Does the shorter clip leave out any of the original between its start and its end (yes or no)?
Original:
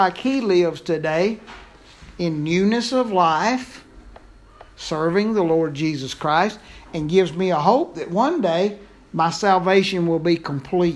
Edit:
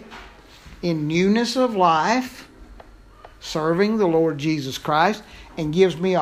no